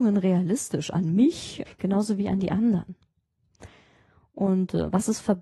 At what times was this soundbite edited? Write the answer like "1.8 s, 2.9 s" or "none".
1.7 s